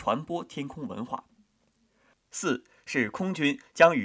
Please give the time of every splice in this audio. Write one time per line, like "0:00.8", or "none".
0:02.1